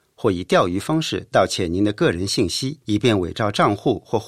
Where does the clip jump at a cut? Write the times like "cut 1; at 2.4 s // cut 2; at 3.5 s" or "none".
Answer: cut 1; at 2.8 s